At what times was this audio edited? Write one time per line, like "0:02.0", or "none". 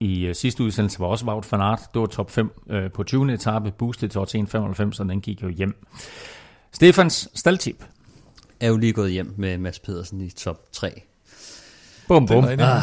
none